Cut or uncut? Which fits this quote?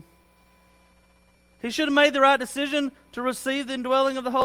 uncut